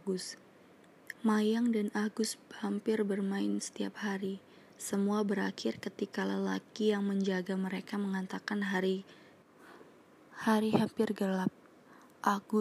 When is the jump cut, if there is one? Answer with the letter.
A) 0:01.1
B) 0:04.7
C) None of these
A